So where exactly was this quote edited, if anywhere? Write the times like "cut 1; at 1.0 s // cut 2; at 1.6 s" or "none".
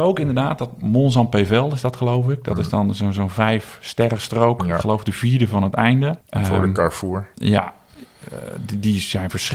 cut 1; at 6.2 s